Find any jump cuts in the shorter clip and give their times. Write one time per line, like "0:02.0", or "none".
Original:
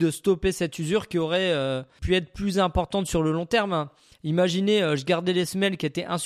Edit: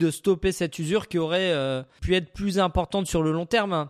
none